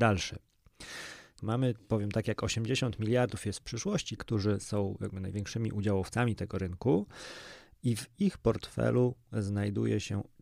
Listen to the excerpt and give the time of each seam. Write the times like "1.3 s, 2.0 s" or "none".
1.4 s, 4.2 s